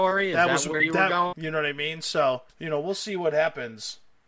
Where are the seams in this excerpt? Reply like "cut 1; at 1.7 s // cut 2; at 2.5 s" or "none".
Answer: cut 1; at 1.3 s // cut 2; at 2.5 s

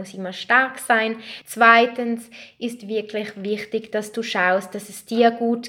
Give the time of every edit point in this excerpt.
cut 1; at 1.4 s

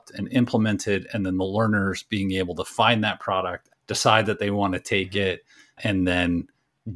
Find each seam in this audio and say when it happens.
cut 1; at 3.7 s

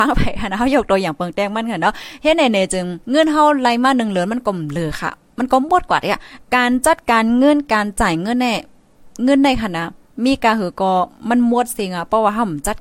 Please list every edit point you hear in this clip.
cut 1; at 3.0 s

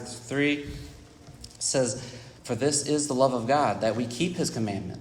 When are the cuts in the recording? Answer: cut 1; at 2.4 s

